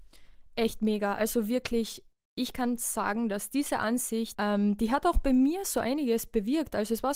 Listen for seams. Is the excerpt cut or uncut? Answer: cut